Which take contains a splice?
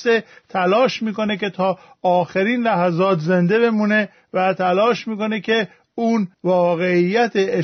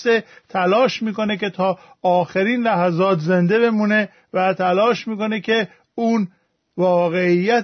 first; 1 cut; at 6.3 s

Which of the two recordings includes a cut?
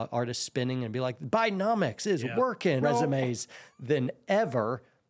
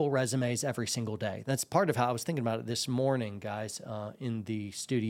first; 1 cut; at 2.8 s

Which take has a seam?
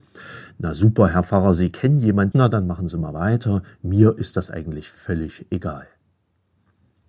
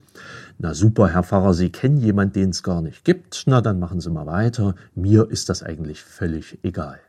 first; 1 cut; at 2.3 s

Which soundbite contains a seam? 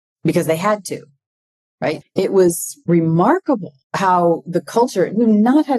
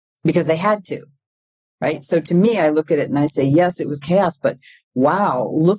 first; 2 cuts; at 2.0 s, 3.8 s

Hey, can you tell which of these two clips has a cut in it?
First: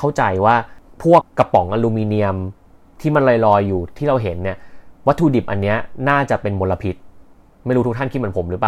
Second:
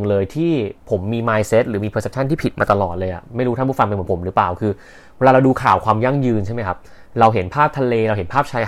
first; 1 cut; at 1.2 s

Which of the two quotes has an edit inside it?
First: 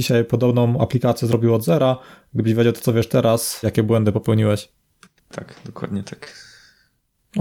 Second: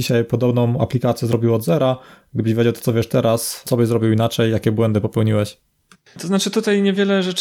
first; 2 cuts; at 3.6 s, 5.2 s

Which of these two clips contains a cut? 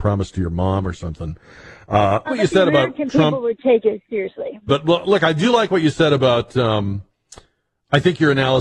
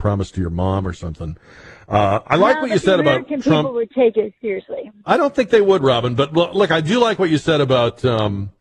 first; 2 cuts; at 2.3 s, 4.7 s

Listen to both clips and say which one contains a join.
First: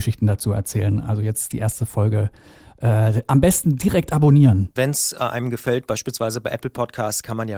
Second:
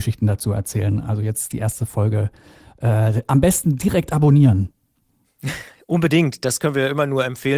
first; 1 cut; at 4.8 s

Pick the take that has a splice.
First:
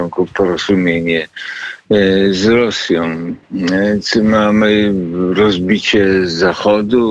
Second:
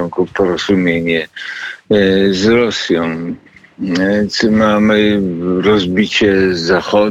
first; 1 cut; at 3.4 s

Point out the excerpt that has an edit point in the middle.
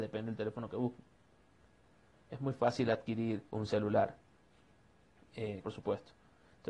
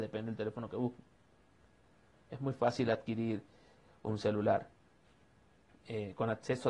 first; 2 cuts; at 3.5 s, 5.6 s

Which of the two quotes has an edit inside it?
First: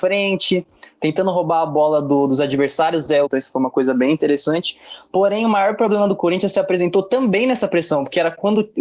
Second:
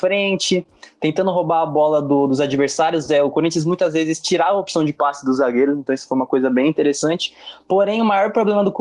first; 1 cut; at 3.2 s

